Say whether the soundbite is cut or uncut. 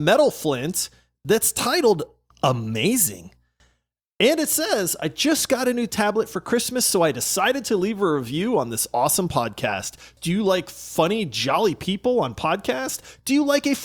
cut